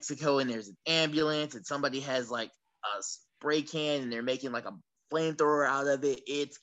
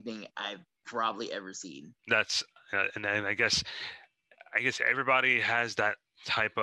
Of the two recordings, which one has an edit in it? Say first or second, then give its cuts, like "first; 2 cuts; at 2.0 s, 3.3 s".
second; 1 cut; at 2.0 s